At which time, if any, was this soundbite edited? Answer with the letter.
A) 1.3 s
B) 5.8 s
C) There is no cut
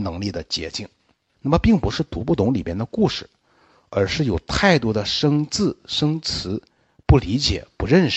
A